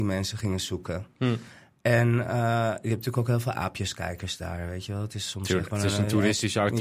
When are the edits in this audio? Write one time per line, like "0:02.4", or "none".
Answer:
none